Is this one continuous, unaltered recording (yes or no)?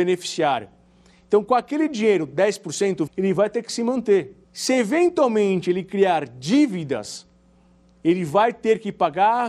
no